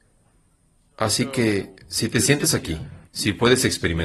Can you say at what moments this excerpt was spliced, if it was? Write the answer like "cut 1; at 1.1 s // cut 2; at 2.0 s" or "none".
cut 1; at 3.1 s